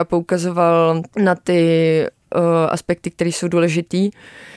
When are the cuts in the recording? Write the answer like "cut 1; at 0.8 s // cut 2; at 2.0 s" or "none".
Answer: cut 1; at 1.1 s